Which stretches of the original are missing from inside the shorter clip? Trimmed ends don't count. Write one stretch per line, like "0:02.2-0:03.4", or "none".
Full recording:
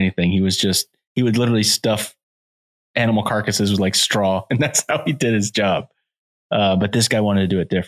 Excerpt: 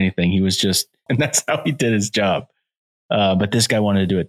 0:01.1-0:04.5